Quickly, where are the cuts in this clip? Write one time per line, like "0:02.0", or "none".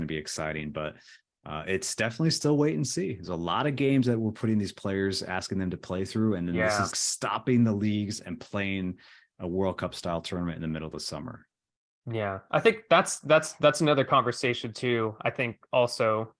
0:06.9